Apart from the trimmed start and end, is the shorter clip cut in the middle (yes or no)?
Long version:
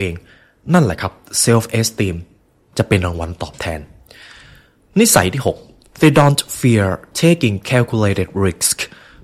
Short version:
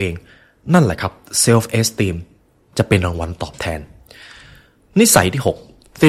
no